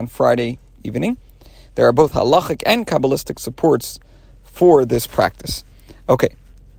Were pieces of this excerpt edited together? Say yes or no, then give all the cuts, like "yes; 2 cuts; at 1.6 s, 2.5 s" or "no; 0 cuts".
no; 0 cuts